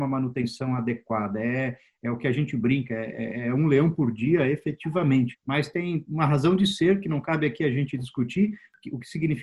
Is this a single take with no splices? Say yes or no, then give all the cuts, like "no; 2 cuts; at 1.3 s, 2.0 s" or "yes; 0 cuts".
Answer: no; 1 cut; at 5.3 s